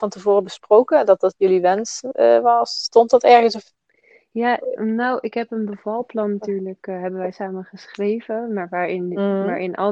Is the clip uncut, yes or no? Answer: yes